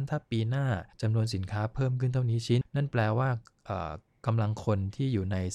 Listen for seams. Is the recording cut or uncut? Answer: cut